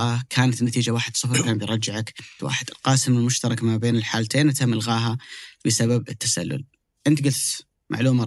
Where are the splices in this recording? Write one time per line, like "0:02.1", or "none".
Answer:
0:02.4